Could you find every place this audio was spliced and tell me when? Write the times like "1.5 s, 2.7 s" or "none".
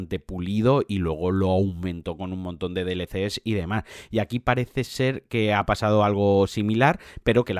none